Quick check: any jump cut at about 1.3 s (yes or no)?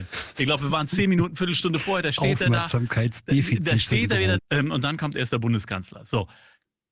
no